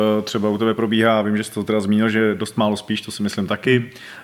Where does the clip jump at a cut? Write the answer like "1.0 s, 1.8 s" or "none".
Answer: none